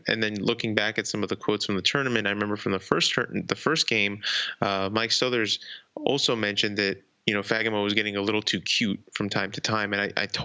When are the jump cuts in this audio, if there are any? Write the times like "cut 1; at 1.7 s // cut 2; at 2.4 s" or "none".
none